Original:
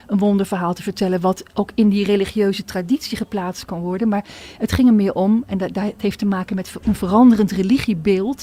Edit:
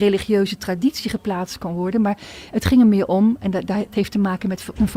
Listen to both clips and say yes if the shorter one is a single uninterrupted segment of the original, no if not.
yes